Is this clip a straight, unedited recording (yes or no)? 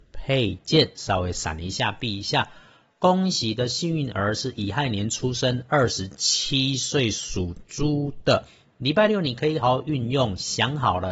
no